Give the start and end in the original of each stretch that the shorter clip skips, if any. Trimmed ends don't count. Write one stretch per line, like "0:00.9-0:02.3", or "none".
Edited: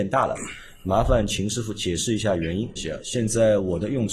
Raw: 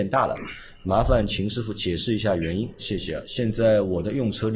0:02.8-0:03.0

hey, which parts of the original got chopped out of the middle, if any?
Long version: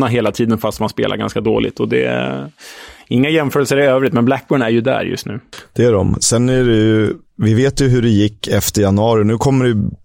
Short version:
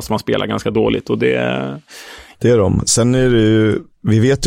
0:03.0-0:05.7

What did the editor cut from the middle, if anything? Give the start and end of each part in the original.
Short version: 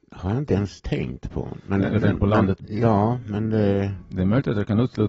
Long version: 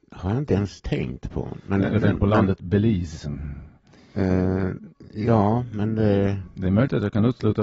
0:02.6-0:05.1

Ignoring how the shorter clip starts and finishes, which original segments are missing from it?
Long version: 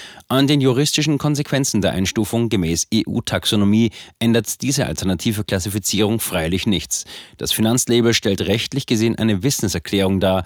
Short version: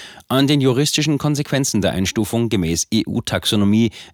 none

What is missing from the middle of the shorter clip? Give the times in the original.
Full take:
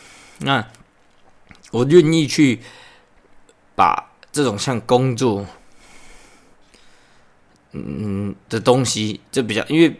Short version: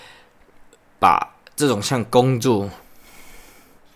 none

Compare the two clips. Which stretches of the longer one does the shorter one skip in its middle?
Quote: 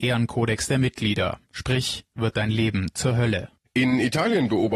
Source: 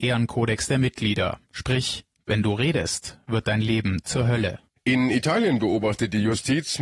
0:02.1-0:03.2

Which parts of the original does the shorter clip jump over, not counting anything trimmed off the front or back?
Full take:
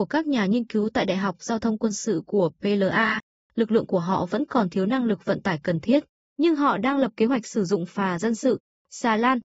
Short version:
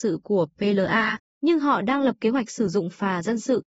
0:03.3-0:06.2

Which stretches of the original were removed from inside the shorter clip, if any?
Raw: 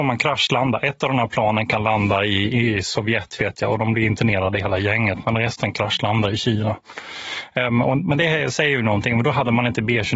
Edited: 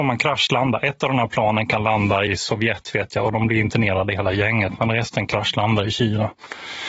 0:02.3-0:02.7

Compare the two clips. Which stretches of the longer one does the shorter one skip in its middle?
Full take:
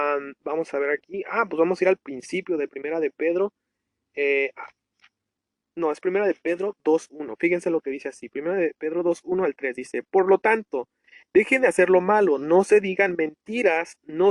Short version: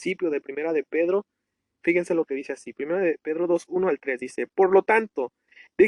0:04.1-0:07.4

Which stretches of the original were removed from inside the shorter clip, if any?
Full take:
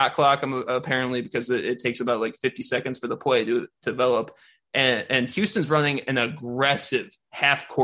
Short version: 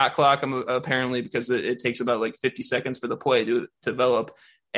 none

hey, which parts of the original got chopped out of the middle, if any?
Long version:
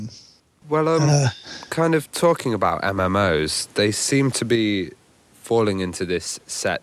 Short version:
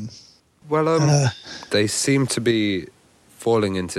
0:01.7-0:03.7

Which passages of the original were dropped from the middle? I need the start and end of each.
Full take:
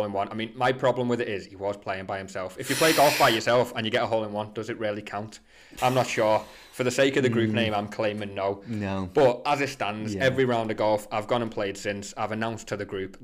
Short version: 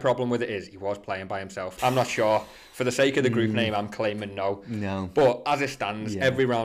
0:02.5-0:05.8

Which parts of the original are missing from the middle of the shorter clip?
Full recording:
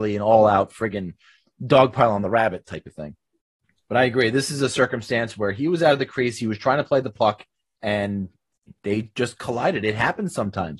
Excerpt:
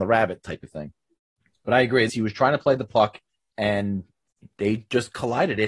0:04.3-0:06.3

